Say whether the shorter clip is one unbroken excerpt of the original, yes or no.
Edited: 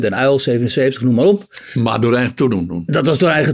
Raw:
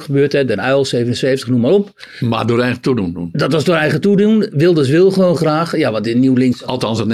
yes